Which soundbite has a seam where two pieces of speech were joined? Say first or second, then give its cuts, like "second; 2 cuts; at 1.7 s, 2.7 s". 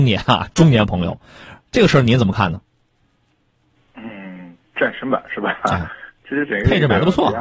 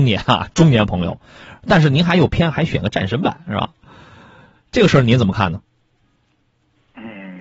first; 1 cut; at 1.6 s